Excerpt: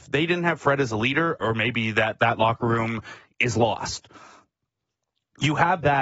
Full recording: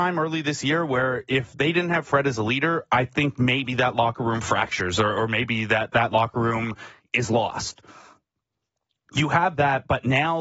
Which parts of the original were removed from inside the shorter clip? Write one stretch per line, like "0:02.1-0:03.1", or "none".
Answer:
0:02.9-0:05.1